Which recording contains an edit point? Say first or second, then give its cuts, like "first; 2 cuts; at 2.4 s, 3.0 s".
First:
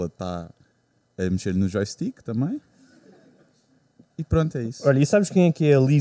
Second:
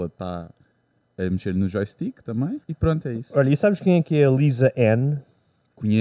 second; 1 cut; at 2.6 s